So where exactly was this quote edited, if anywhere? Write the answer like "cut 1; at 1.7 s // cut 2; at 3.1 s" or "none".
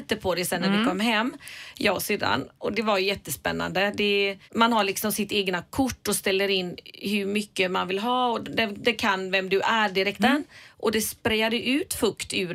cut 1; at 4.4 s // cut 2; at 10.2 s